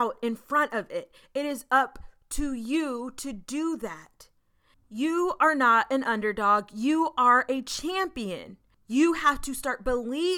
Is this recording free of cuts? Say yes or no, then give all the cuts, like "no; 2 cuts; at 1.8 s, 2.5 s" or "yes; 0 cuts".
no; 1 cut; at 4.7 s